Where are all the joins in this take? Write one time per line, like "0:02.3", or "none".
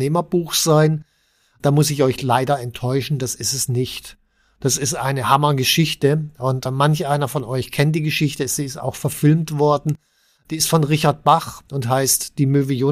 none